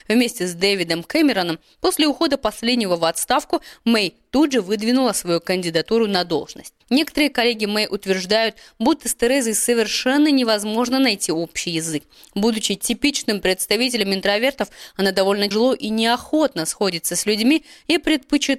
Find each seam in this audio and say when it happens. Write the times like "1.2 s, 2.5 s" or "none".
6.8 s, 15.5 s